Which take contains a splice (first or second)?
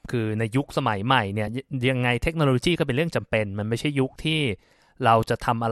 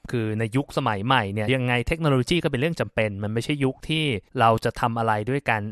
second